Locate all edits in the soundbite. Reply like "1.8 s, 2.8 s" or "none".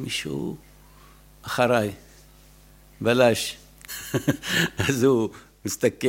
3.9 s